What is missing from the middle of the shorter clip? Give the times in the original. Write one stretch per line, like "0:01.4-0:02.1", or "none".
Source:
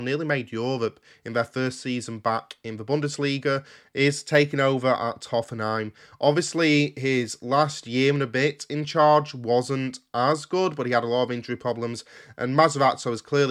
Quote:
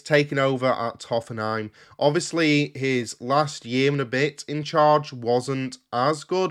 none